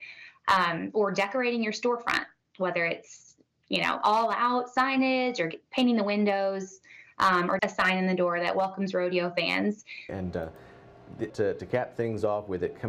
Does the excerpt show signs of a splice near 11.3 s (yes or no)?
yes